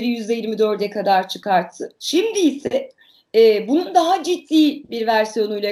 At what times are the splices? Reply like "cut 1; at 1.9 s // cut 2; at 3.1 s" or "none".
cut 1; at 2.0 s